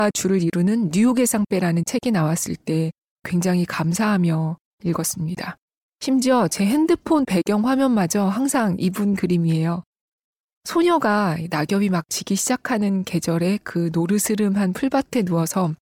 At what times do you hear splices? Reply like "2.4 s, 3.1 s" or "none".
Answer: none